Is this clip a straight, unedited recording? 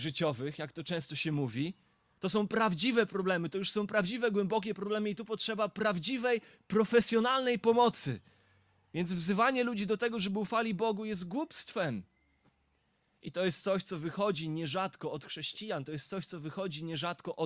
yes; 0 cuts

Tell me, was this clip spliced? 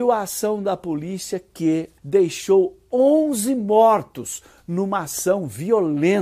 yes; 1 cut; at 2.0 s

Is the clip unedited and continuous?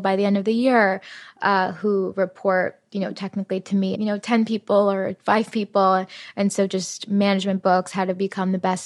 no; 1 cut; at 3.9 s

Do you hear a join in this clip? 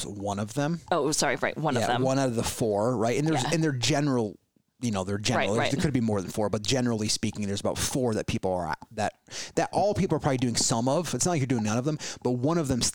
no; 0 cuts

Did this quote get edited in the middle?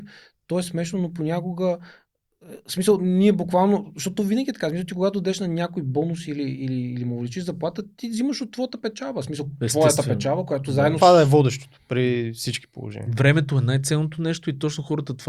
yes; 1 cut; at 11.0 s

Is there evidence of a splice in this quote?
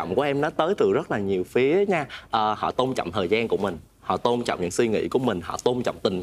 no; 0 cuts

